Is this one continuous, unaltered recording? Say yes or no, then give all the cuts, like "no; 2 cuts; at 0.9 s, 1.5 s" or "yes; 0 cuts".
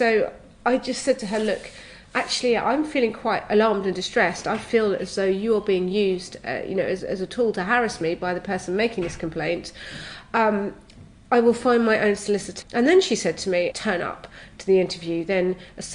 no; 3 cuts; at 7.0 s, 12.6 s, 13.7 s